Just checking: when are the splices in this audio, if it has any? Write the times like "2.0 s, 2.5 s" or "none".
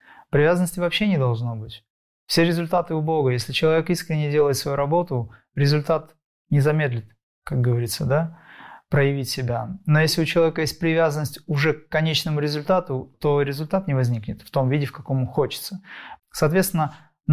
13.1 s, 16.2 s